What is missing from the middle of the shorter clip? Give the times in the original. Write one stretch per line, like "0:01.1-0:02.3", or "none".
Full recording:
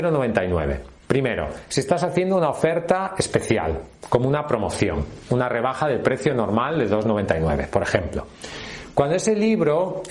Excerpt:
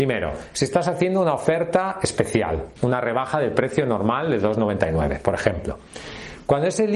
0:03.9-0:05.2